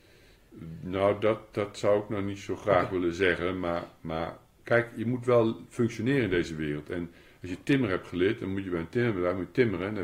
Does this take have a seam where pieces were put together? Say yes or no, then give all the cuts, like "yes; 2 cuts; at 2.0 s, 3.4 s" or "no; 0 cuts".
no; 0 cuts